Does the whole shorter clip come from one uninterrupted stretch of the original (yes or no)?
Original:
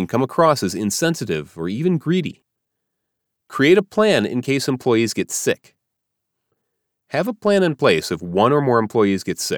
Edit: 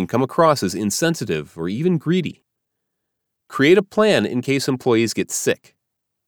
yes